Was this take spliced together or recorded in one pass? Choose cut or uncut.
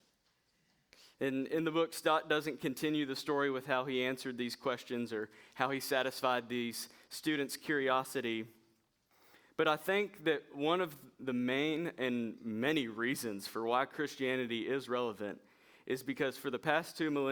uncut